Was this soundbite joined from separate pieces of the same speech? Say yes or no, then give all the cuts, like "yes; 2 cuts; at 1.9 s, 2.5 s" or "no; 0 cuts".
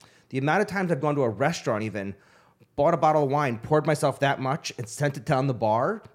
no; 0 cuts